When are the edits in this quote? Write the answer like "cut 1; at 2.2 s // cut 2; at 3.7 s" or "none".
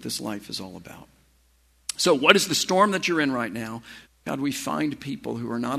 cut 1; at 4.1 s